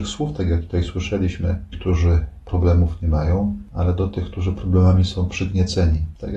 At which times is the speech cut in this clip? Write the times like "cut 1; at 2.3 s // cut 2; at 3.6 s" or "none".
cut 1; at 1.7 s